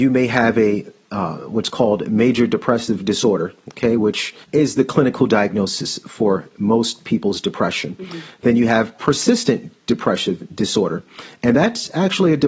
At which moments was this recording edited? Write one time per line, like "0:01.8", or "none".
0:04.4